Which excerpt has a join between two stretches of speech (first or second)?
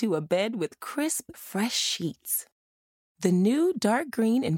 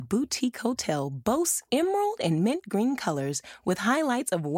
first